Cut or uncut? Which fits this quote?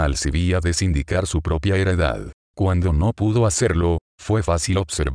uncut